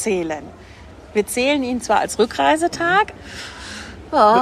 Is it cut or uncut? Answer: cut